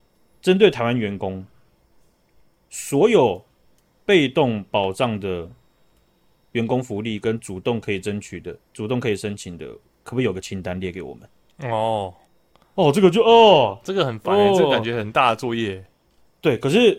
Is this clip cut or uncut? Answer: uncut